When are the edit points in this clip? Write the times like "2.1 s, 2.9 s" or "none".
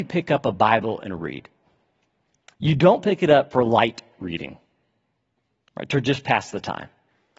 none

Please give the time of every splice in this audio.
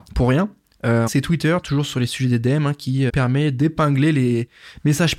1.1 s, 3.1 s

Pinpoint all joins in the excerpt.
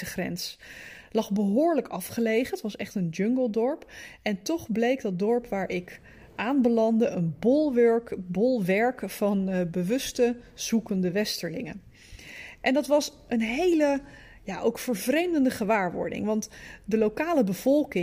none

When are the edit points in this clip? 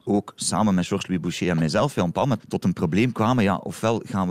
2.4 s

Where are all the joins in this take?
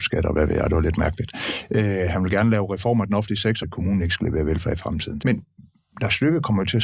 3.6 s, 5.2 s

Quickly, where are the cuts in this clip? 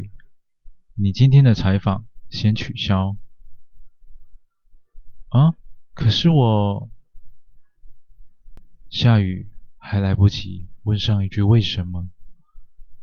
none

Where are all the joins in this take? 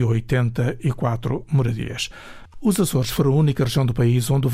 2.5 s

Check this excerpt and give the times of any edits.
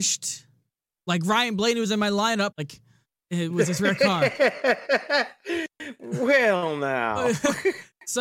2.5 s

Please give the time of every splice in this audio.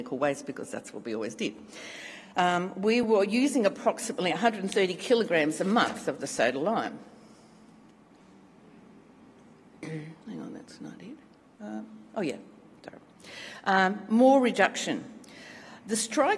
3.0 s

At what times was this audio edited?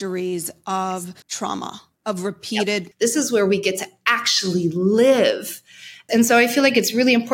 1.2 s, 2.9 s, 6.1 s

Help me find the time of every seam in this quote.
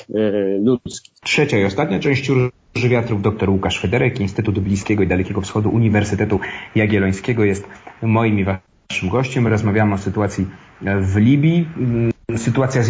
none

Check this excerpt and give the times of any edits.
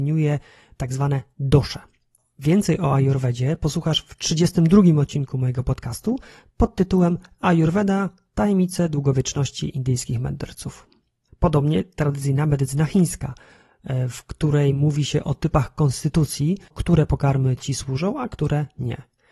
16.7 s

